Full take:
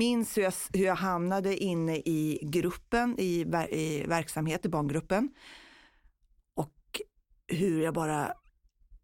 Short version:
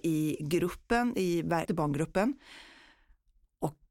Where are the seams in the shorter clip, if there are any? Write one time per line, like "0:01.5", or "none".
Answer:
0:01.7